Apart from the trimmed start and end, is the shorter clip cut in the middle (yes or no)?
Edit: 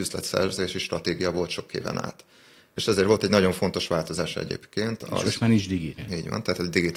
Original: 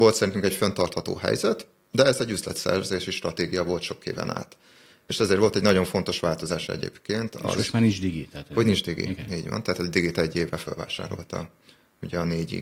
yes